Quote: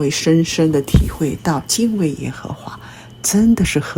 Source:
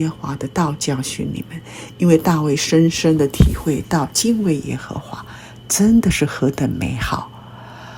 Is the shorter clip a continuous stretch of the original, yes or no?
yes